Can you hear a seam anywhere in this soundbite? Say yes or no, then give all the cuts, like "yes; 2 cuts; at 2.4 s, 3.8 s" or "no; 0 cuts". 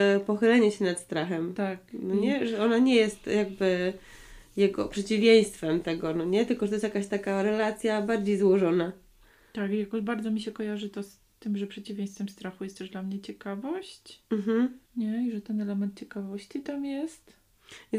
yes; 1 cut; at 14.9 s